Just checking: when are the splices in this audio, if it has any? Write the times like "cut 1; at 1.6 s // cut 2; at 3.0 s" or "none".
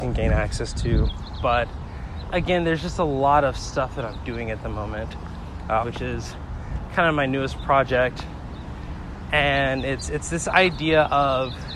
cut 1; at 5.8 s